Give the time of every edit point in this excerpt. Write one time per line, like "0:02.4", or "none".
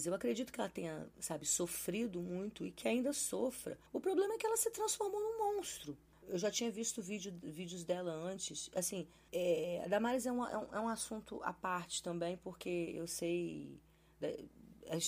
0:03.9
0:06.2